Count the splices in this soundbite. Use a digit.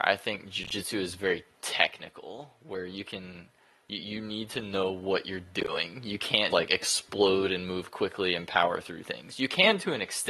1